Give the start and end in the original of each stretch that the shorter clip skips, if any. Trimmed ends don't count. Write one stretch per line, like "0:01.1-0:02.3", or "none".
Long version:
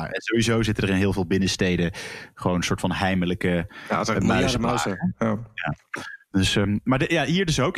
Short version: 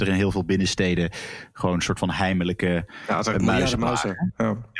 none